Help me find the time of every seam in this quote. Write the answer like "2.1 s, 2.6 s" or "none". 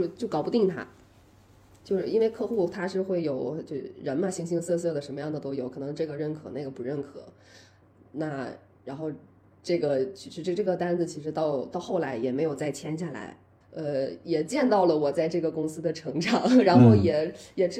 13.6 s